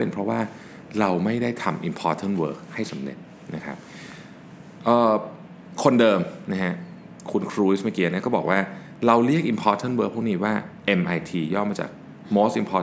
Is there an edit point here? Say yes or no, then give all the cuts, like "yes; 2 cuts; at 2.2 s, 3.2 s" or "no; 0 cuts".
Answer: no; 0 cuts